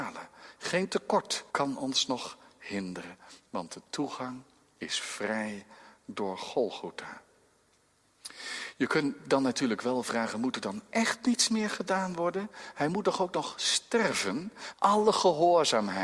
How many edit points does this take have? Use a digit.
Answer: 2